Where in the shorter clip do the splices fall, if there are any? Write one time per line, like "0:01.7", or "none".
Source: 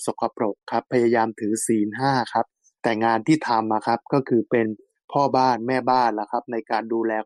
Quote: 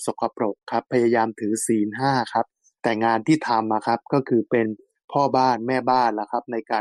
none